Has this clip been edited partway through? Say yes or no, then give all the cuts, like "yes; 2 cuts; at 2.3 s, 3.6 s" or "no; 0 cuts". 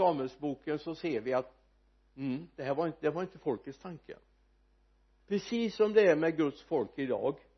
no; 0 cuts